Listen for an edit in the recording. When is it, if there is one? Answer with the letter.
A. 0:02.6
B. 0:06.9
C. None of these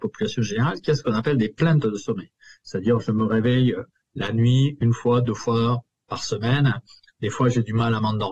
C